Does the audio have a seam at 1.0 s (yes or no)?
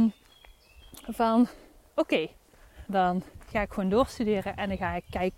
no